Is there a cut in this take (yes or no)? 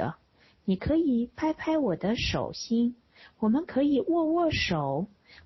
no